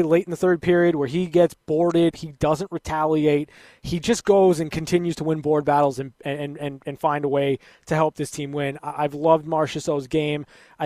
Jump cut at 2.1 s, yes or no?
yes